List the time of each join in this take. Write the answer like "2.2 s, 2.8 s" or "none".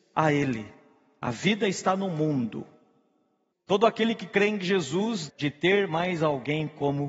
3.5 s, 5.3 s